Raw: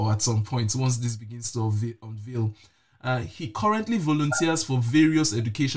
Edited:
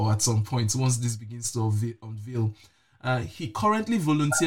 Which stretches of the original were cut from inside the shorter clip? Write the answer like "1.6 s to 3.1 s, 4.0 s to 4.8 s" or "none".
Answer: none